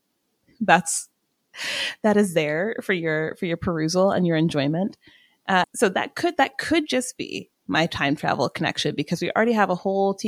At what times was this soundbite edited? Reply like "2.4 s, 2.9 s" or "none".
5.6 s